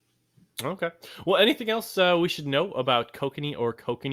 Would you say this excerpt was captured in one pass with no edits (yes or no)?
yes